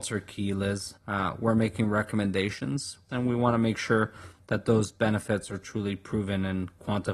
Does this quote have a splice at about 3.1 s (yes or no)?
yes